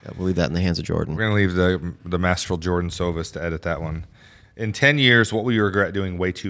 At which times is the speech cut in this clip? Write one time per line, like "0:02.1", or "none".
none